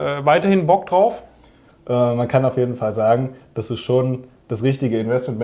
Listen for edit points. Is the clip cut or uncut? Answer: cut